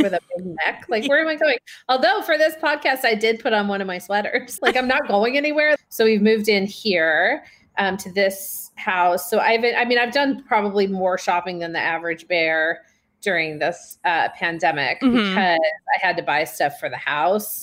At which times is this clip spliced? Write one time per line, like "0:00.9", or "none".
0:04.6
0:05.8